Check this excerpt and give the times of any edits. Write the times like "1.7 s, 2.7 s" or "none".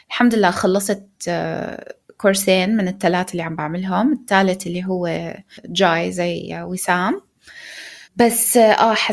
8.0 s